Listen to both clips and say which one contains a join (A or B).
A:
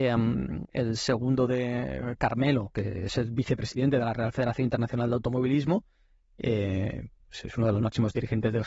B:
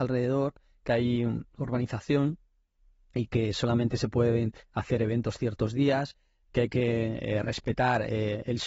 A